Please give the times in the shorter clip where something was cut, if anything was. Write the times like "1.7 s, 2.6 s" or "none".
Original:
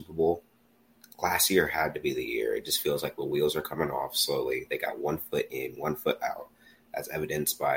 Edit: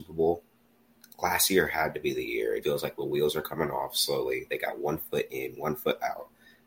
2.6 s